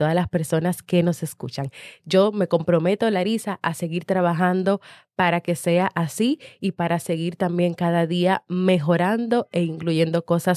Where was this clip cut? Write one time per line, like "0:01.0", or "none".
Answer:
0:02.0